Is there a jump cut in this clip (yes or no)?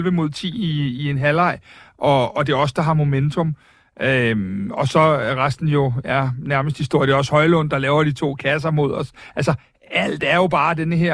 no